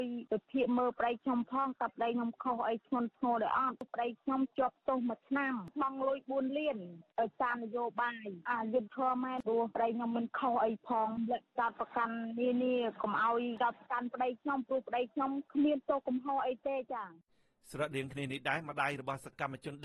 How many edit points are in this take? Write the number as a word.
one